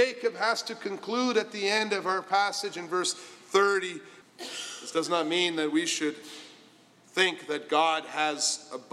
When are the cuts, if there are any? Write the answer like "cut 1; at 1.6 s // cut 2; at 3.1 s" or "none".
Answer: cut 1; at 4.2 s